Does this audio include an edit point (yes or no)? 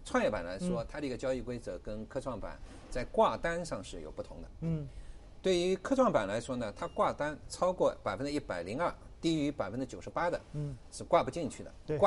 no